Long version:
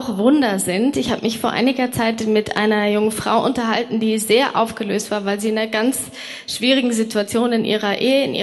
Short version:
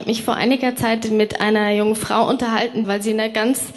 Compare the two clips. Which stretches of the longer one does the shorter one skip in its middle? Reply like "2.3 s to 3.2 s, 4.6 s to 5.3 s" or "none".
4.0 s to 5.2 s